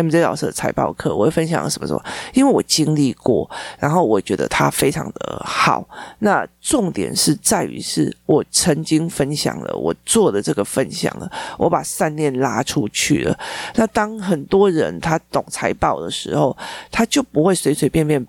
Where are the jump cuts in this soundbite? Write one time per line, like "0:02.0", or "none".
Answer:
none